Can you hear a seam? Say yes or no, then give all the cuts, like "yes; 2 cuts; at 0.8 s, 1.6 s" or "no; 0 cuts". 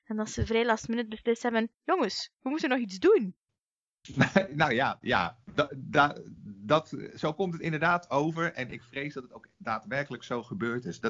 yes; 1 cut; at 5.4 s